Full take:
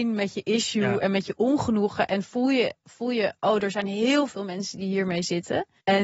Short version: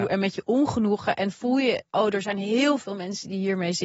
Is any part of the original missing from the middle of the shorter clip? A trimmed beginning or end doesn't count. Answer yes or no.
yes